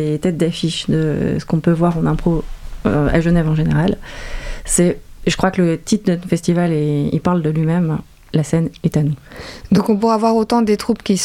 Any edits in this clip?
no; 0 cuts

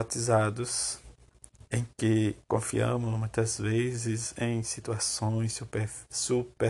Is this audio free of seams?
no; 1 cut; at 2.4 s

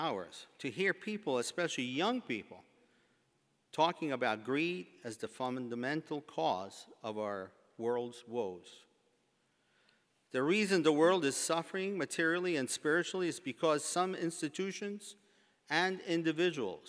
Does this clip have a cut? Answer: no; 0 cuts

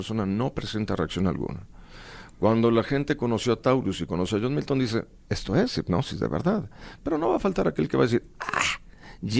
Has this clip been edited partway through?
no; 0 cuts

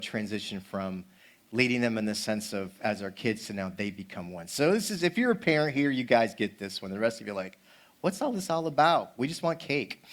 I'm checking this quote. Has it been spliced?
no; 0 cuts

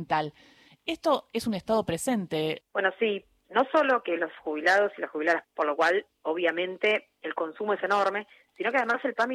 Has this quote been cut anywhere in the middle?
yes; 2 cuts; at 2.6 s, 5.4 s

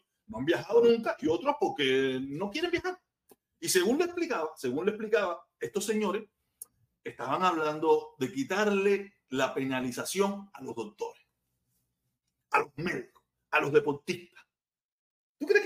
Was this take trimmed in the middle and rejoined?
no; 0 cuts

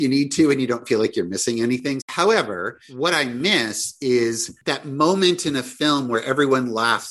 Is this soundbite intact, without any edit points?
no; 1 cut; at 2.0 s

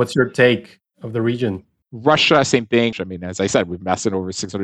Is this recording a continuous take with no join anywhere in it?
no; 2 cuts; at 1.8 s, 2.9 s

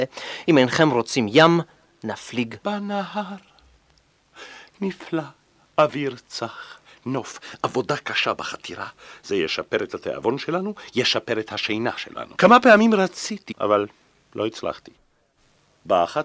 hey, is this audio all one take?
no; 3 cuts; at 2.6 s, 12.3 s, 13.5 s

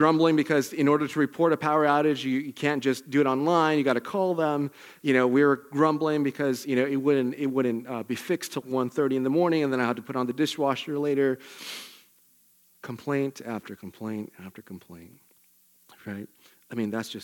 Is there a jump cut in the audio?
yes; 1 cut; at 8.6 s

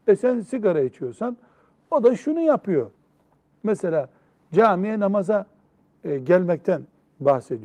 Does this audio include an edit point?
yes; 1 cut; at 3.5 s

